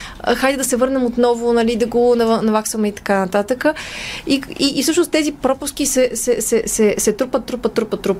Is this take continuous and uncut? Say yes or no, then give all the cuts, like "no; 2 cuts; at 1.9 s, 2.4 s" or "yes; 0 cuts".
yes; 0 cuts